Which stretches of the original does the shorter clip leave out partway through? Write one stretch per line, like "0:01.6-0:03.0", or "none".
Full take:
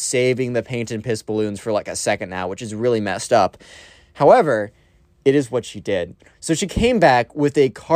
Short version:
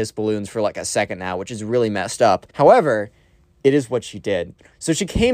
0:03.6-0:04.1